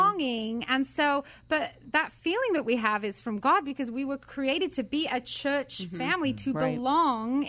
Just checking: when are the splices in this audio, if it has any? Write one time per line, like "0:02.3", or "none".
none